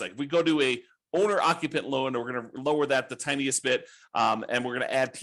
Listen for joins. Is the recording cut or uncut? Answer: uncut